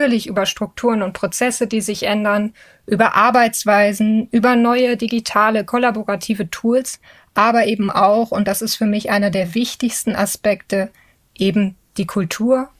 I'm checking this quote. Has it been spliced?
no; 0 cuts

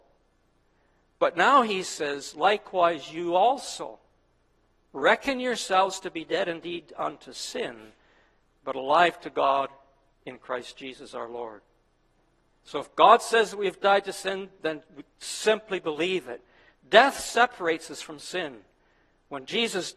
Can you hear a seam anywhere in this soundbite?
no; 0 cuts

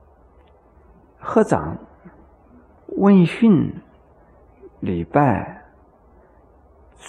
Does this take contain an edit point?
yes; 1 cut; at 2.8 s

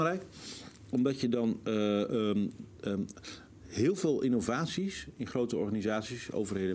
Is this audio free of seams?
yes; 0 cuts

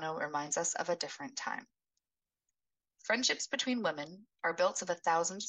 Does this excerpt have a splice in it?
yes; 2 cuts; at 2.8 s, 4.3 s

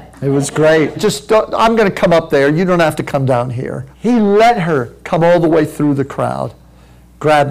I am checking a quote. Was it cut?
yes; 2 cuts; at 1.0 s, 3.9 s

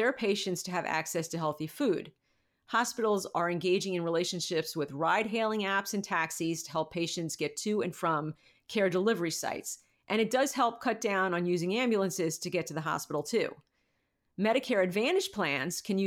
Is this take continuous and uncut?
yes; 0 cuts

